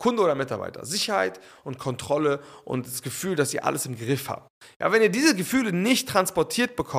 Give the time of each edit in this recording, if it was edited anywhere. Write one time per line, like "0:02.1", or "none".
none